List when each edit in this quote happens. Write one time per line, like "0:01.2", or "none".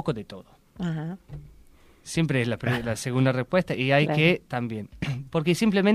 none